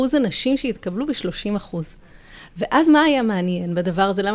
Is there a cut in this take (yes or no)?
no